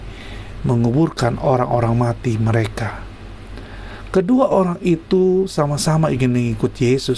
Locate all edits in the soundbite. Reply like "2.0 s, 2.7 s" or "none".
none